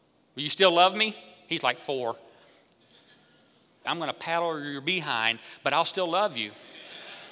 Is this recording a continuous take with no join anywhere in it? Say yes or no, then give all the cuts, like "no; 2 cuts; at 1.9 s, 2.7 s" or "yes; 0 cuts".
no; 1 cut; at 3.8 s